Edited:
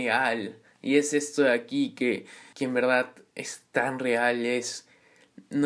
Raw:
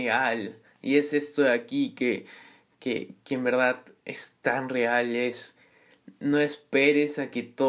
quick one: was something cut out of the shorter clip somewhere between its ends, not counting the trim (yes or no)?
yes